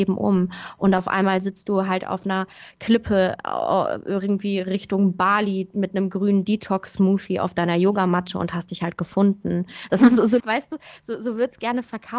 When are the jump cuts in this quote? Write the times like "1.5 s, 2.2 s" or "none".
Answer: 10.4 s